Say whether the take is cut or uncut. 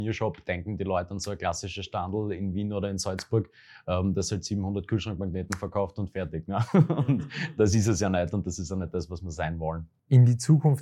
uncut